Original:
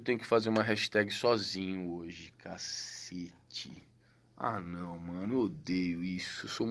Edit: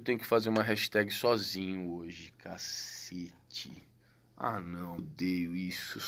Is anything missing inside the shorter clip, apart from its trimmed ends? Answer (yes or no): yes